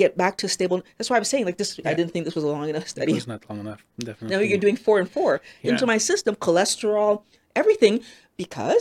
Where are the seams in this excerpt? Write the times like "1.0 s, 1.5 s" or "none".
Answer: 1.8 s, 5.6 s